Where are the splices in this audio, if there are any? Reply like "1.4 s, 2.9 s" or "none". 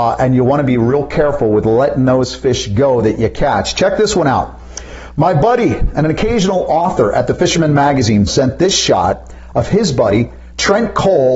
8.3 s